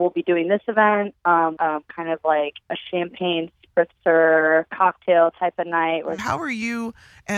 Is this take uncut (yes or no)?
no